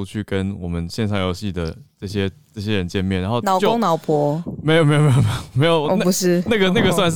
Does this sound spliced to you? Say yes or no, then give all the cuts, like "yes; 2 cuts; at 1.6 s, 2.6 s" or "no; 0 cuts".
no; 0 cuts